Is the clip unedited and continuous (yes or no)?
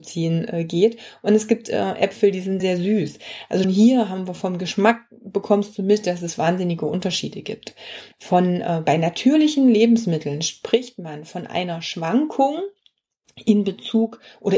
no